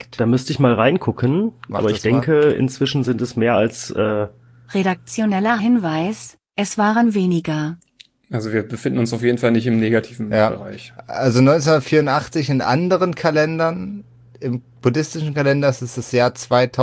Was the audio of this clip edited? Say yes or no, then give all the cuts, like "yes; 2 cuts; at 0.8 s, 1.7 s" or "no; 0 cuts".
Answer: no; 0 cuts